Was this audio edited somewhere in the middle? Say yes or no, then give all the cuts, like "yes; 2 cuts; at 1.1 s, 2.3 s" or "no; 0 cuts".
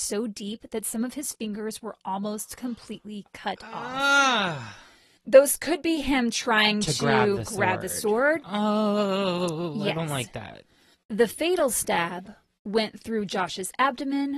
no; 0 cuts